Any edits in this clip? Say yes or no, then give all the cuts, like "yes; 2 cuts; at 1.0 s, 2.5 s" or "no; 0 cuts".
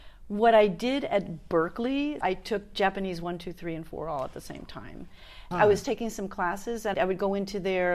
yes; 3 cuts; at 2.2 s, 5.5 s, 6.9 s